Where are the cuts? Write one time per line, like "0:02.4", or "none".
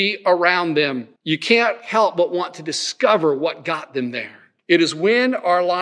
0:01.2
0:04.6